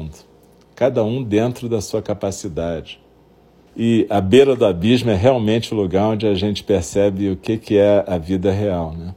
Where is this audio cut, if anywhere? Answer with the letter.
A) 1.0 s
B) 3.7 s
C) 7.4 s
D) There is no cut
B